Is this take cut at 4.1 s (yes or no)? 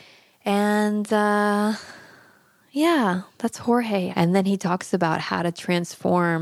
yes